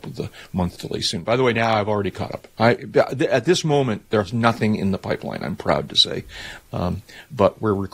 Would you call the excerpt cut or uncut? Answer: uncut